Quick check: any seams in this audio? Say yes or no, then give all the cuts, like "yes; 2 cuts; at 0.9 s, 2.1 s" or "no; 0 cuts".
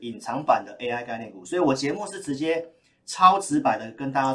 no; 0 cuts